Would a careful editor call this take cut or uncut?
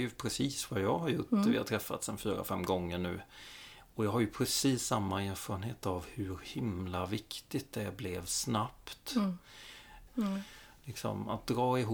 cut